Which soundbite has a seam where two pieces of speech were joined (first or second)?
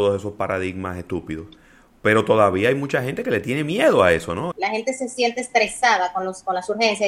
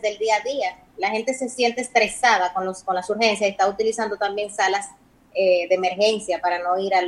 first